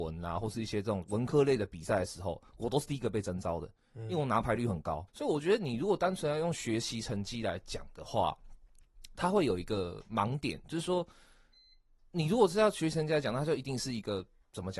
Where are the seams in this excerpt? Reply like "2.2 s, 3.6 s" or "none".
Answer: 5.1 s